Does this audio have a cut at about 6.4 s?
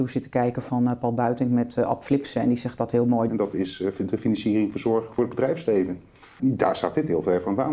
yes; 2 cuts; at 3.3 s, 6.4 s

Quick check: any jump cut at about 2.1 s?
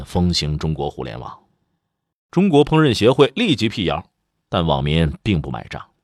yes; 1 cut; at 2.1 s

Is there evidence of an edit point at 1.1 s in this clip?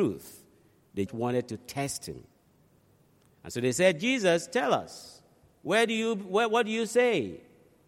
yes; 1 cut; at 1.1 s

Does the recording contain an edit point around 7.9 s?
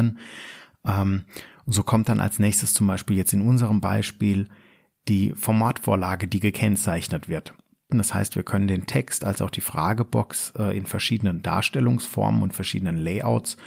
yes; 1 cut; at 7.9 s

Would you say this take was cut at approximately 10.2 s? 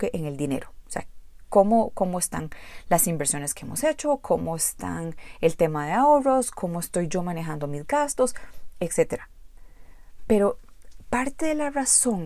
no; 0 cuts

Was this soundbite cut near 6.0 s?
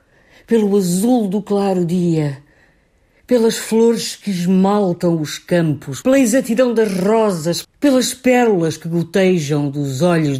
yes; 2 cuts; at 6.0 s, 7.6 s

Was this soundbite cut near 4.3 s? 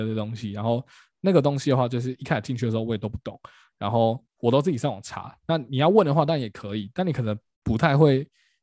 yes; 1 cut; at 4.3 s

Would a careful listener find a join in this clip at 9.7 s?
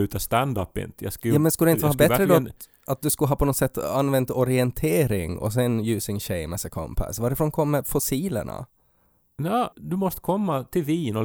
yes; 1 cut; at 9.7 s

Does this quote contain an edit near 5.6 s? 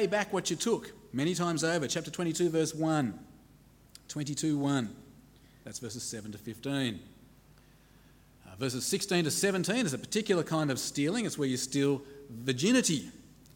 yes; 1 cut; at 5.6 s

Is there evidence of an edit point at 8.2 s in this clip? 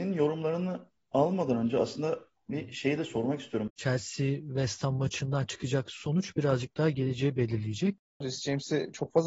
yes; 2 cuts; at 3.7 s, 8.2 s

